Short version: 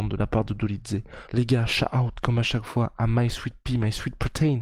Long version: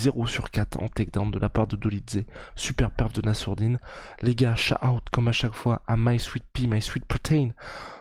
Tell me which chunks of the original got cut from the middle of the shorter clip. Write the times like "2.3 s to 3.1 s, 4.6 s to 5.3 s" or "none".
2.5 s to 4.2 s